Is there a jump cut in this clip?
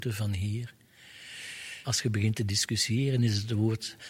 yes; 1 cut; at 1.8 s

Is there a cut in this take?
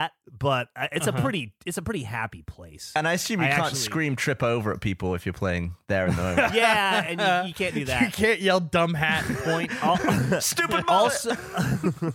no; 0 cuts

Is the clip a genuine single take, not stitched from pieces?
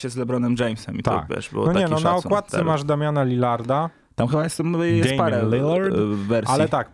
yes; 0 cuts

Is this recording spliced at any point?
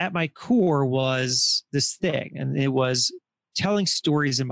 no; 0 cuts

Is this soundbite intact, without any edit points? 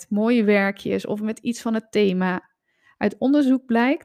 yes; 0 cuts

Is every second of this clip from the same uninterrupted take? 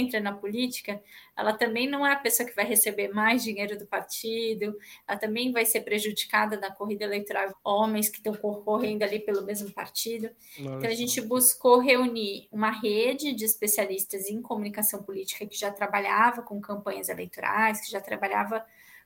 no; 1 cut; at 7.5 s

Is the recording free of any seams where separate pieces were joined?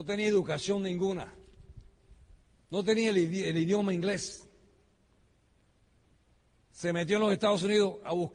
yes; 0 cuts

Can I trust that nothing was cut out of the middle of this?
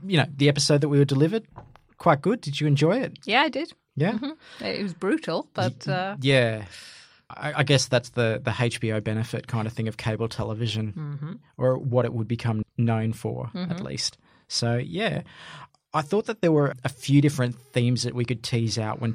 yes; 0 cuts

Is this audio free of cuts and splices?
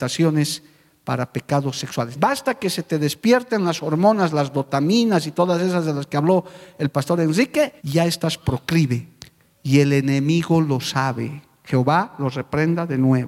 no; 2 cuts; at 2.1 s, 7.8 s

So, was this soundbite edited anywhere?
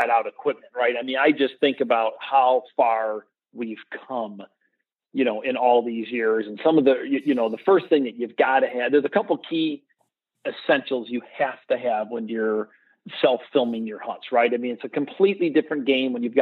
no; 0 cuts

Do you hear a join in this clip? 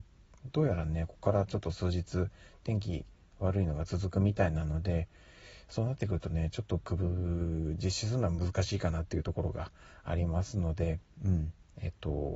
no; 0 cuts

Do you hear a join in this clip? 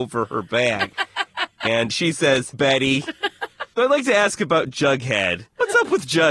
yes; 2 cuts; at 2.5 s, 3.8 s

